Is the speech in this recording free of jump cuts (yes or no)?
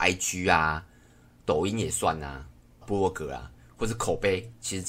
no